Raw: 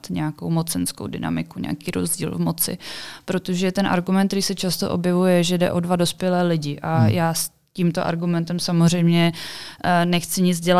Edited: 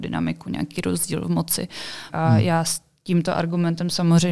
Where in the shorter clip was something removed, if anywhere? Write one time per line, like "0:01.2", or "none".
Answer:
0:02.1